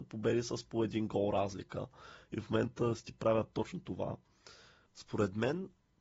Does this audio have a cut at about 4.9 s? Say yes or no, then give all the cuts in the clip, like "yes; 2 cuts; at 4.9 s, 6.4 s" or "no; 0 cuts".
yes; 1 cut; at 4.9 s